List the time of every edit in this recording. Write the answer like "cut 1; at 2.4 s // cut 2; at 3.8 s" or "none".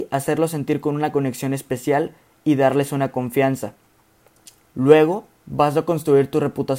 cut 1; at 4.6 s